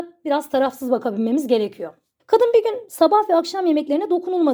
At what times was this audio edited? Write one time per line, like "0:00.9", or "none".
0:02.2